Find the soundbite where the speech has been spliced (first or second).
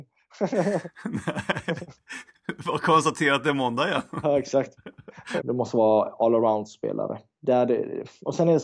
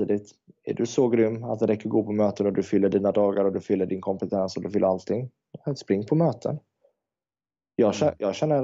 first